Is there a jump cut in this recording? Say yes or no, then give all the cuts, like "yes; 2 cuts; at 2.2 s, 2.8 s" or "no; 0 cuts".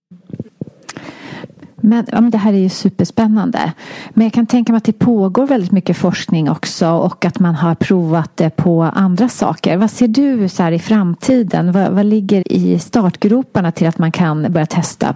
yes; 1 cut; at 12.4 s